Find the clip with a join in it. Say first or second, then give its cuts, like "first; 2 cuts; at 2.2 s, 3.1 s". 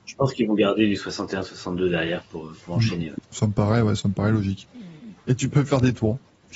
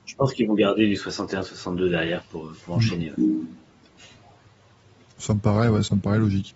first; 2 cuts; at 3.2 s, 5.2 s